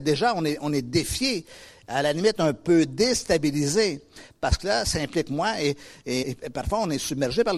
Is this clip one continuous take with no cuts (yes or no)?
no